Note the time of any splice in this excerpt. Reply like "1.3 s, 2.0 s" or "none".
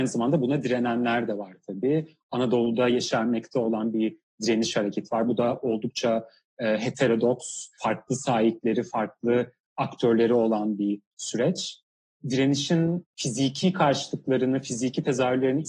none